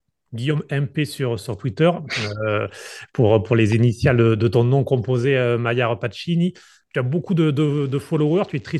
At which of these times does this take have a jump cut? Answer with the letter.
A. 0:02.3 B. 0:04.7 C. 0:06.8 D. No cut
D